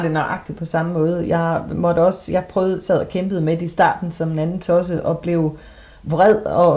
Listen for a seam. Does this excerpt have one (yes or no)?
no